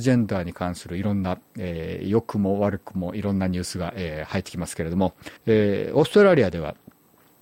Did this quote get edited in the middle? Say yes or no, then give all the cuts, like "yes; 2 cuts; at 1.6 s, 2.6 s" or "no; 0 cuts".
yes; 1 cut; at 5.4 s